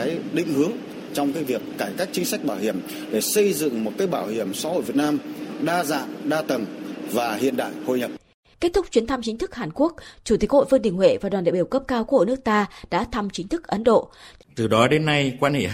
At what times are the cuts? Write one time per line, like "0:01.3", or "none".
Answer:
0:14.4